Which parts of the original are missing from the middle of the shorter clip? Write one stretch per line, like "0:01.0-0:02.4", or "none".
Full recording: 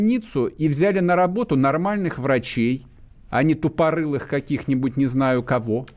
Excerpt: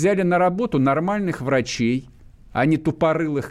none

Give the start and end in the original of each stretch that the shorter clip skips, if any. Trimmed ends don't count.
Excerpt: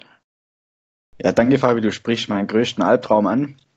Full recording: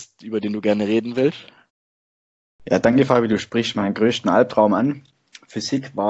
none

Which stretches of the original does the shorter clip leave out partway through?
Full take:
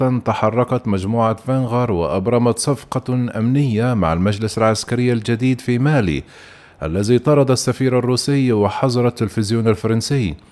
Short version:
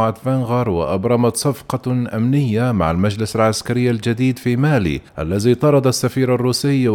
0:06.3-0:06.7

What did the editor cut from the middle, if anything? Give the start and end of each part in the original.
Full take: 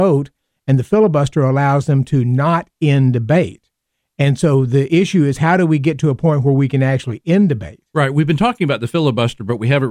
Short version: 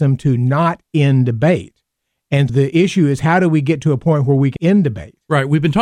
0:04.4-0:04.7
0:06.7-0:07.2

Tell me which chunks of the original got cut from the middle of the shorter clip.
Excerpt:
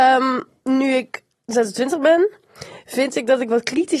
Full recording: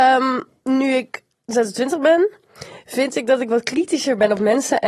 none

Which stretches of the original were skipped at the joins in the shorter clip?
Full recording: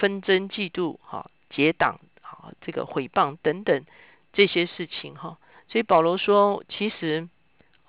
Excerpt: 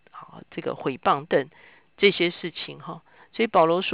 0:03.4-0:03.6

